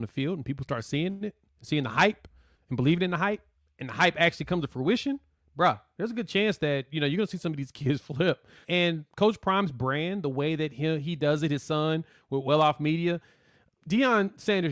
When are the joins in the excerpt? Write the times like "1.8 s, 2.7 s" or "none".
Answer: 8.6 s